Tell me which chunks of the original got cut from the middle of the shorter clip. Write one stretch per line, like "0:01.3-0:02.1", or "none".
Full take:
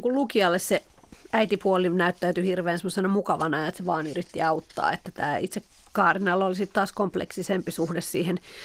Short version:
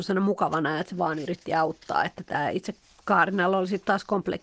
none